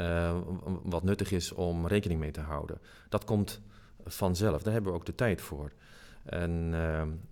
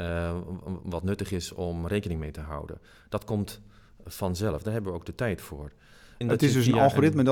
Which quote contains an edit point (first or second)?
second